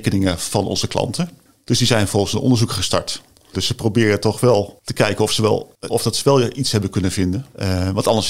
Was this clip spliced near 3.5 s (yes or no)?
yes